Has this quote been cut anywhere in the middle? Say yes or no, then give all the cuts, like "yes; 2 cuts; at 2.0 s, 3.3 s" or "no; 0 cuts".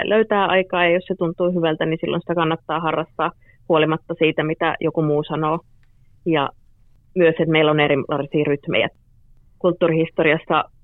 no; 0 cuts